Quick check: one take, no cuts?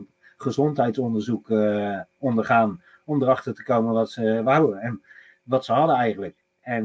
yes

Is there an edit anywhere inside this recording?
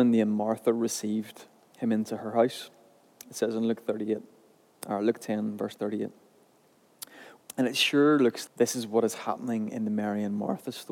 yes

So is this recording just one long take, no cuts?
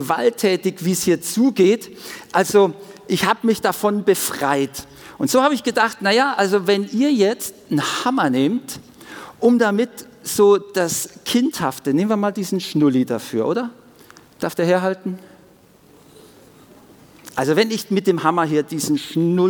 yes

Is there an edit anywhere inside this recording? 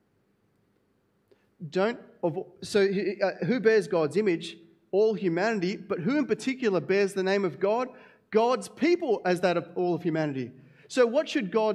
no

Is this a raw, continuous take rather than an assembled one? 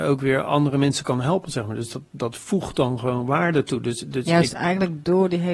yes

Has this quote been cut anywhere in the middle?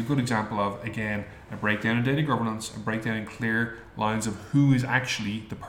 no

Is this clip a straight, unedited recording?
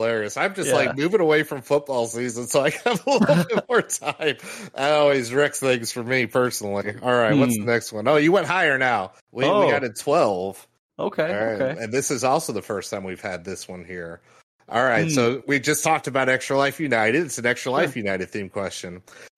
no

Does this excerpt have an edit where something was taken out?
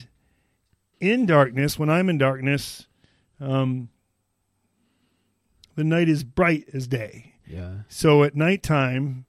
yes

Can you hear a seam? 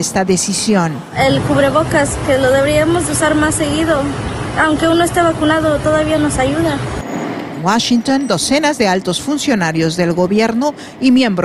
no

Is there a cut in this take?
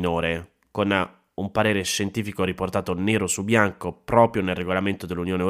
no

